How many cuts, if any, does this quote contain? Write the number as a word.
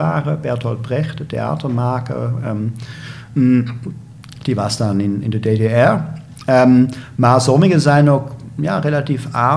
zero